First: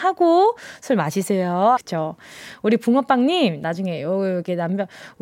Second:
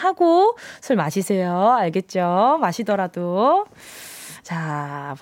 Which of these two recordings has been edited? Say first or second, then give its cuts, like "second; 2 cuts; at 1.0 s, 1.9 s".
first; 1 cut; at 1.8 s